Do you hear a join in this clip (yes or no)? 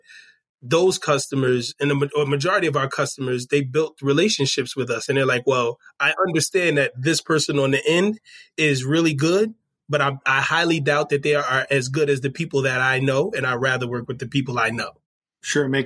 no